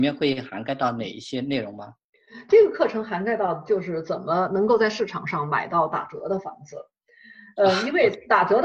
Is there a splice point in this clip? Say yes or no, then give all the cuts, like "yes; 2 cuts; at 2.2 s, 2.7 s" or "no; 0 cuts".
no; 0 cuts